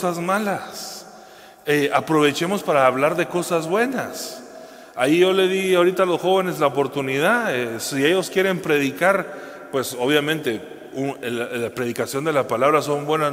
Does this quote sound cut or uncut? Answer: uncut